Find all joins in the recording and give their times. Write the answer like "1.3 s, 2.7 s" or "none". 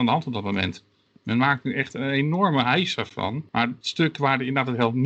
none